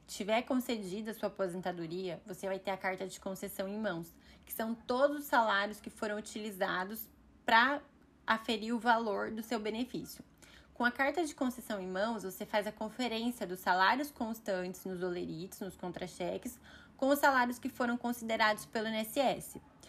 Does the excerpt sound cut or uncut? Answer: uncut